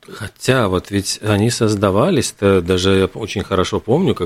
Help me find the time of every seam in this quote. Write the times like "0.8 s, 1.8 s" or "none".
none